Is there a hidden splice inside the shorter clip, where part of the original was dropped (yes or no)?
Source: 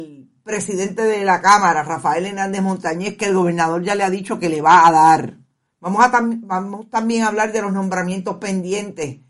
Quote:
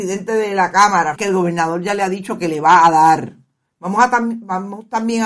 yes